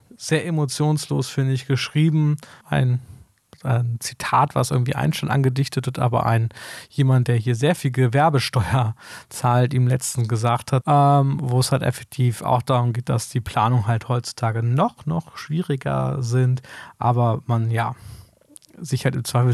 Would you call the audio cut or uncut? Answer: cut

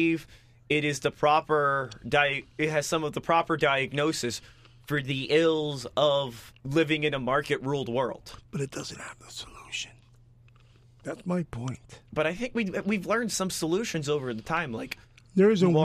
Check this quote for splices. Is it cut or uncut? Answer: uncut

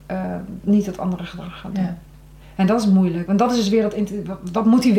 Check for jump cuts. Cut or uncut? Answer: uncut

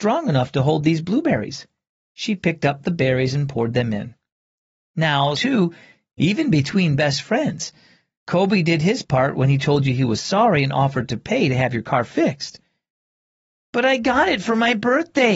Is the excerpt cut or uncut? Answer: cut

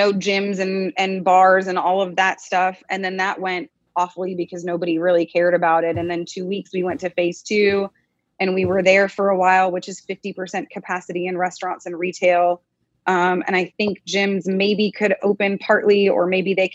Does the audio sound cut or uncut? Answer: uncut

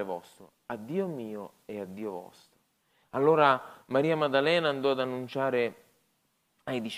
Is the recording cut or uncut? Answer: uncut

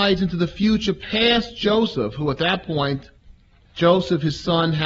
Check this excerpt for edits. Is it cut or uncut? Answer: uncut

